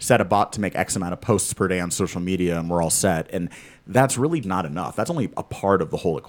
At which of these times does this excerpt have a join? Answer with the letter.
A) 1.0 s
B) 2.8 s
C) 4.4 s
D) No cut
C